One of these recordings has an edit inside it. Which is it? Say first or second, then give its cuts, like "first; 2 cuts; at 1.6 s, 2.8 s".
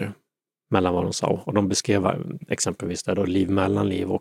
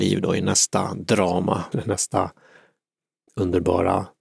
second; 1 cut; at 1.7 s